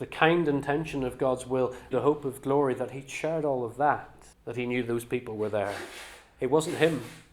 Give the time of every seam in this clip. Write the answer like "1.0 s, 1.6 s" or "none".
1.9 s, 4.3 s